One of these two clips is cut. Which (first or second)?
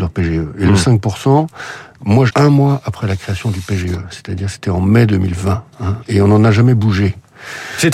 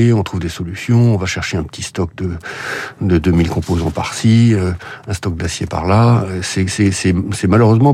first